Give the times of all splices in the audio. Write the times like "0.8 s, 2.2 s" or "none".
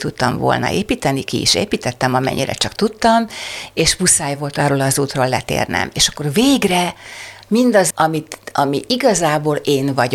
7.9 s